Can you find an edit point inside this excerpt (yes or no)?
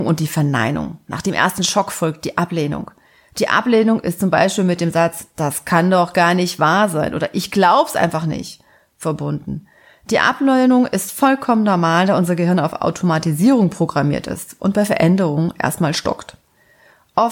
no